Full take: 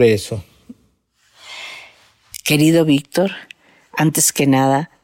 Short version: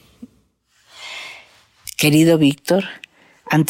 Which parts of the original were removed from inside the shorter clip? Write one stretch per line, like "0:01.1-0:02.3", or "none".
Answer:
none